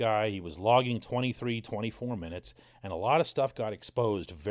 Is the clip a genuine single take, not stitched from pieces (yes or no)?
yes